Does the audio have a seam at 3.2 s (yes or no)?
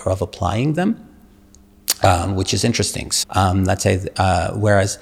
yes